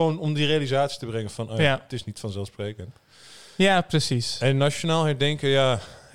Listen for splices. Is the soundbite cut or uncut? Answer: uncut